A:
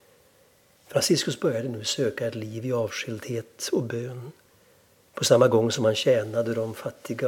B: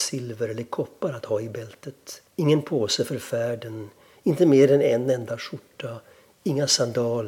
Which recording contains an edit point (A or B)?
B